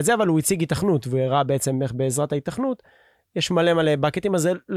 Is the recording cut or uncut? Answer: uncut